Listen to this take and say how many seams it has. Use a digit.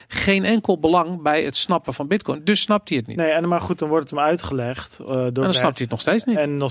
0